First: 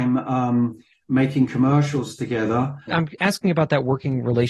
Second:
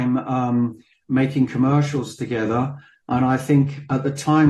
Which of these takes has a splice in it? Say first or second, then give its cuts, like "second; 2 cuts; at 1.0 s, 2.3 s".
first; 1 cut; at 2.9 s